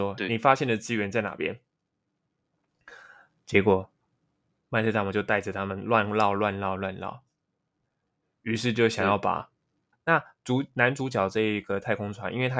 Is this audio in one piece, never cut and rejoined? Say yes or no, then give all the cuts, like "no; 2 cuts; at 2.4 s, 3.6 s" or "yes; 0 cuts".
no; 1 cut; at 9.9 s